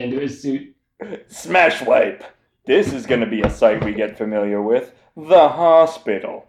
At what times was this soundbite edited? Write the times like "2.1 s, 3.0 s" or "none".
none